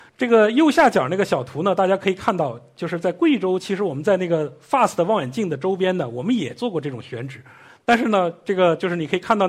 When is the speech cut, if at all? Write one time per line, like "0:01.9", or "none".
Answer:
none